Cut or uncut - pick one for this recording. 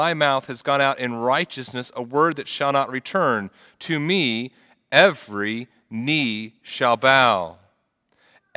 uncut